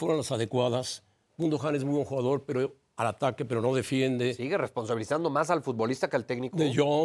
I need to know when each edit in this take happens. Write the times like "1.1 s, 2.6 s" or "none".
none